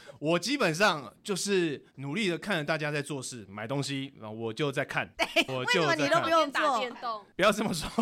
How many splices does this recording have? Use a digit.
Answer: 2